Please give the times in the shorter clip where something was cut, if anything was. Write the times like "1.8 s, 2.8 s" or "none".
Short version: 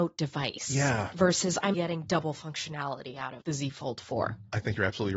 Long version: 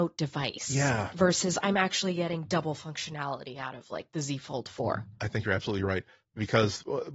1.7 s, 3.4 s